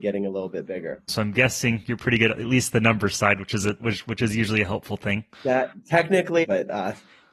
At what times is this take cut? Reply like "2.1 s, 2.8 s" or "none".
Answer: 1.1 s, 5.3 s, 6.4 s